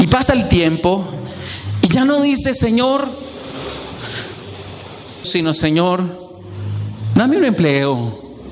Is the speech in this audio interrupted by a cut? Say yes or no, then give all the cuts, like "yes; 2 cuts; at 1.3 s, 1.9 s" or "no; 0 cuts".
yes; 1 cut; at 5.2 s